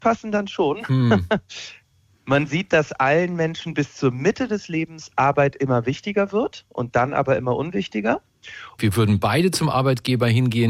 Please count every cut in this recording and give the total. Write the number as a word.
one